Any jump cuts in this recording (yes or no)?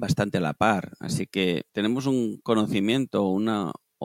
yes